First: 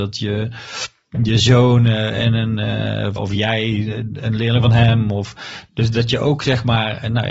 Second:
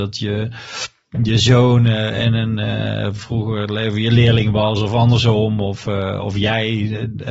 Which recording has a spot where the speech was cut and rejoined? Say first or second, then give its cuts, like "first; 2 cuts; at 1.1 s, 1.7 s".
first; 1 cut; at 3.2 s